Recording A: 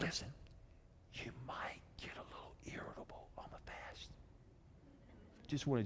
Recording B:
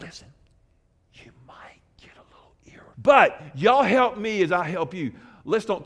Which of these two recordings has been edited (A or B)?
B